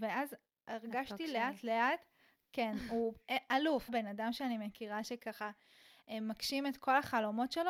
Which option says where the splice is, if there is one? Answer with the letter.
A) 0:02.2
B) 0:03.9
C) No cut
B